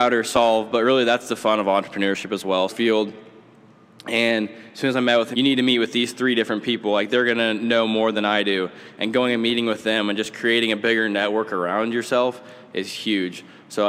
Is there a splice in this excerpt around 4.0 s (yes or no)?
no